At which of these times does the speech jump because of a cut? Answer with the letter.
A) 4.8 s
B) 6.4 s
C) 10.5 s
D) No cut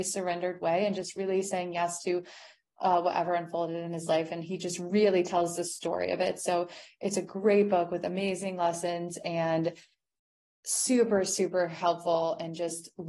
D